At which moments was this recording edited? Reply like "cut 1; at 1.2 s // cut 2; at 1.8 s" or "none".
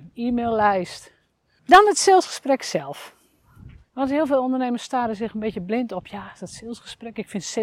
cut 1; at 1.6 s // cut 2; at 3.8 s